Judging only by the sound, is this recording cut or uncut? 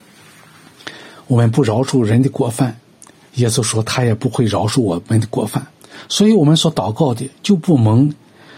uncut